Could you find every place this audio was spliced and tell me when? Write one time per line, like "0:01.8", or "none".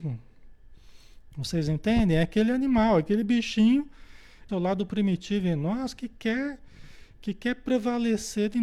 0:01.3
0:04.5